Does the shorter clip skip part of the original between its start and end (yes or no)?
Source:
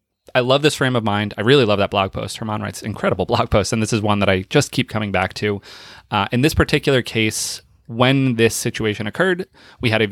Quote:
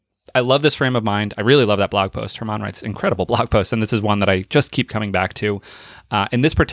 no